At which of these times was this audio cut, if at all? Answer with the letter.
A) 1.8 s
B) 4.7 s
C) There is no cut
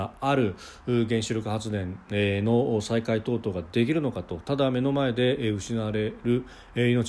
C